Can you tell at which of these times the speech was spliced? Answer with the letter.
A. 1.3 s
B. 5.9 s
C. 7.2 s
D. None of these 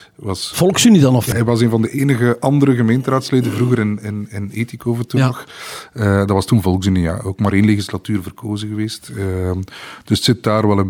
A